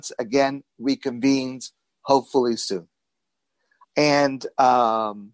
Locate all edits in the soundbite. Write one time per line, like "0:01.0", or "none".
0:03.8